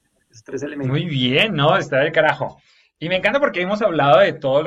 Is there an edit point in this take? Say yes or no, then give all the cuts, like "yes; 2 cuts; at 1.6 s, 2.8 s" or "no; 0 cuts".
no; 0 cuts